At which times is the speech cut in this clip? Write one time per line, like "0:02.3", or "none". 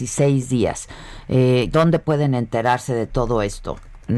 0:01.7